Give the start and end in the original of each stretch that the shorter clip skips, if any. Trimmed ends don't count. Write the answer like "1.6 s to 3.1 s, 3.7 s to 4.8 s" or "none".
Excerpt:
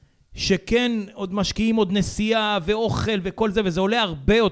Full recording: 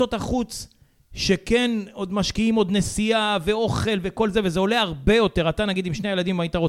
none